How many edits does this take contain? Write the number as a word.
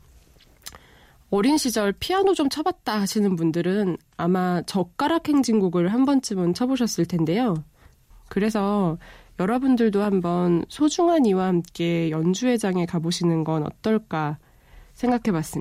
one